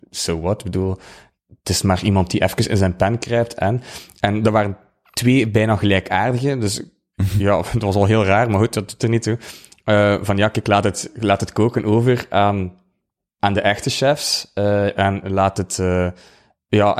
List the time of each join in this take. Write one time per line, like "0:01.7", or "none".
none